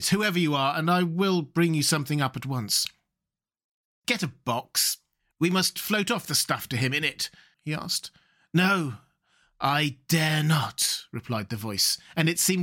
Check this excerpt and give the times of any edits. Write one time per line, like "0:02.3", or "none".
0:04.0
0:07.5